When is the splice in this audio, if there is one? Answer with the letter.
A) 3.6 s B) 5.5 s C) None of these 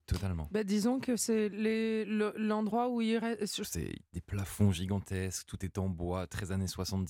A